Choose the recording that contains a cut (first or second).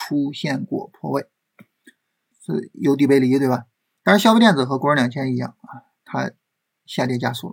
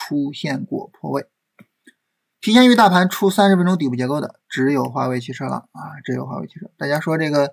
first